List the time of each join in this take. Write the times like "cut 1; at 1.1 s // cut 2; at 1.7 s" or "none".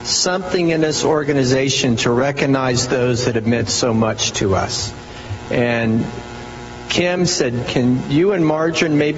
cut 1; at 5.5 s // cut 2; at 7.6 s